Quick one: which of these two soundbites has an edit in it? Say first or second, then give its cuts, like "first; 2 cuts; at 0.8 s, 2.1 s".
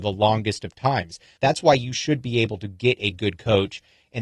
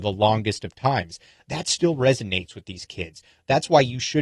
first; 1 cut; at 1.4 s